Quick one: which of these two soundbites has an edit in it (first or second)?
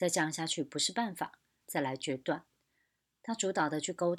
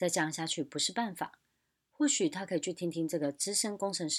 first